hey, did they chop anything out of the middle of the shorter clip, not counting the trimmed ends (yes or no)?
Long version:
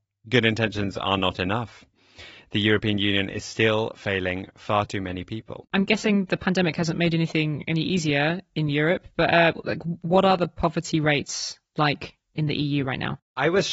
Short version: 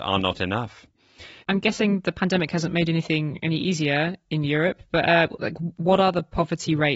yes